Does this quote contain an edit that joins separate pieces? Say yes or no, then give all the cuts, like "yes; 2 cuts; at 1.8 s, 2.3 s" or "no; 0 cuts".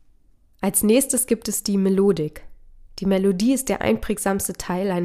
no; 0 cuts